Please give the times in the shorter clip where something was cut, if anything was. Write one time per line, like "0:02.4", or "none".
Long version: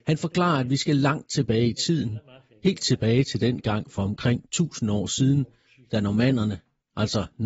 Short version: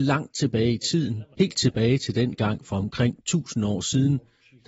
0:01.3